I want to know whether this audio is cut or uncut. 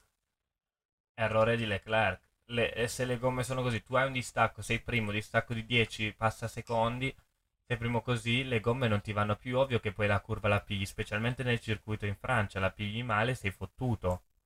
uncut